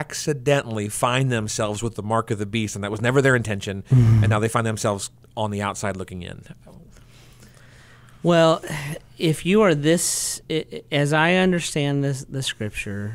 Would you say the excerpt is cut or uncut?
uncut